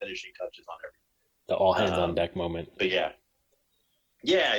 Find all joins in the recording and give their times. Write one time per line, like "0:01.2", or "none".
none